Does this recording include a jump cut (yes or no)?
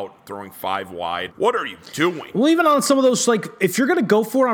yes